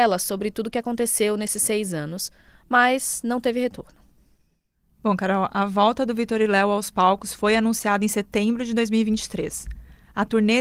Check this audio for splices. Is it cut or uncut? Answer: uncut